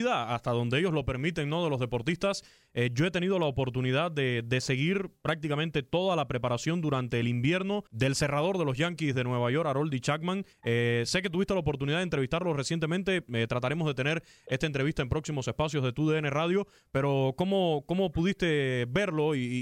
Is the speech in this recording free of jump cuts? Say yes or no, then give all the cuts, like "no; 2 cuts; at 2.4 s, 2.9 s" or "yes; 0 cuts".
no; 2 cuts; at 7.9 s, 10.5 s